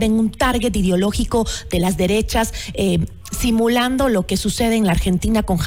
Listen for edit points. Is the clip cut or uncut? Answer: uncut